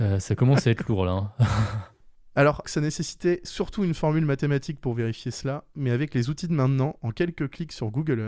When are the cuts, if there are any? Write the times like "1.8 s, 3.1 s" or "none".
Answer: 2.6 s

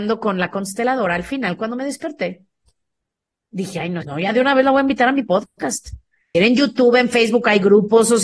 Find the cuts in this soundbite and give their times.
4.0 s, 6.3 s

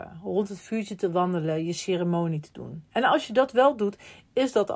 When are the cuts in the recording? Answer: none

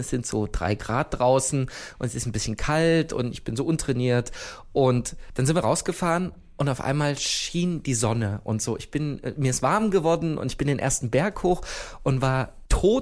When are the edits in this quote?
none

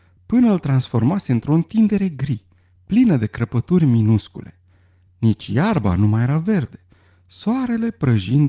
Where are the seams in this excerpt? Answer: none

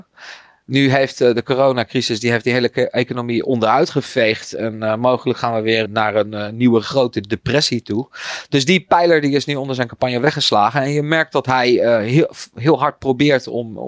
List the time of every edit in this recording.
5.9 s

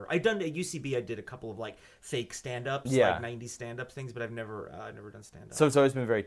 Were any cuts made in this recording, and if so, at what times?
none

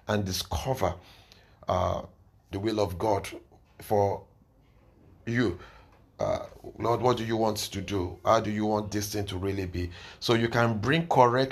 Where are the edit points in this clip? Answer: 2.5 s

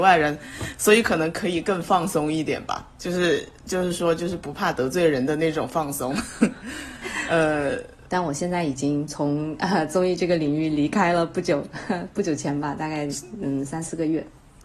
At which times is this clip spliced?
8.1 s

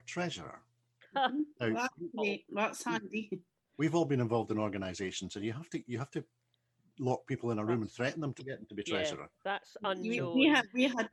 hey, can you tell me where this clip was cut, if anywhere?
none

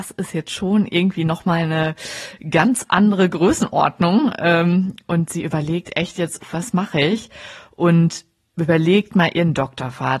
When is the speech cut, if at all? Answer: 6.4 s

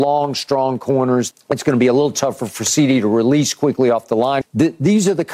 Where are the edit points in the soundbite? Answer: 1.3 s, 4.4 s

